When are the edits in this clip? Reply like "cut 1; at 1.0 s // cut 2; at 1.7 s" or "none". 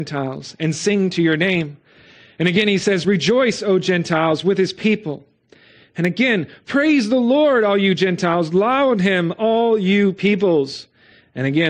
none